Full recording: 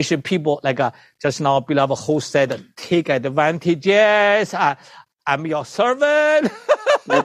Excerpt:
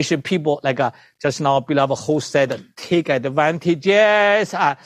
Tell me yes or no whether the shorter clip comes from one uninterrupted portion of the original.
yes